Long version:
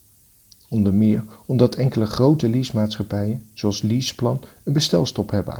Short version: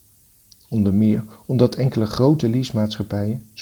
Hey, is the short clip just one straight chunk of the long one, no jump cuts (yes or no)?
yes